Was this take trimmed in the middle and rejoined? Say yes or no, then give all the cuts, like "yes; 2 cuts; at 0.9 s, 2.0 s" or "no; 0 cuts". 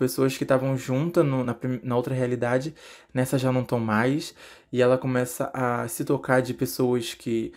no; 0 cuts